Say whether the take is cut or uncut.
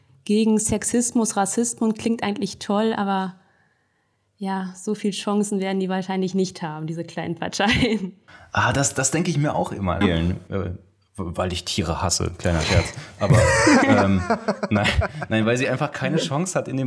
cut